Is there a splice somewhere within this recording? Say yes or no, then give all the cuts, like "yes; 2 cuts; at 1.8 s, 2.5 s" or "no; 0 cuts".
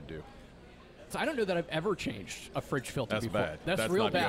yes; 1 cut; at 1.1 s